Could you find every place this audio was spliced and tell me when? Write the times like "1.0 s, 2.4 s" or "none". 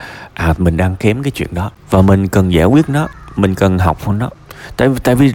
1.8 s